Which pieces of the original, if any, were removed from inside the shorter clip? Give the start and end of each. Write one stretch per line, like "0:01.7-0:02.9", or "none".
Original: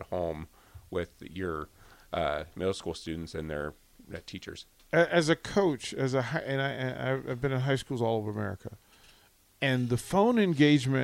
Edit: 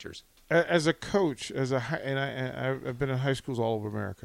none